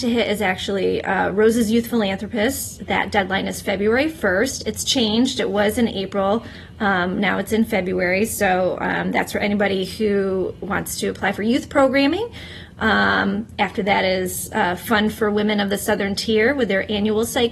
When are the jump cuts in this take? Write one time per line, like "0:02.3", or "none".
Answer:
none